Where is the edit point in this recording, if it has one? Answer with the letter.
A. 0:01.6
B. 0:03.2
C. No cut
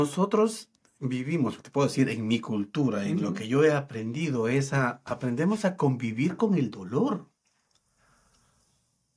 A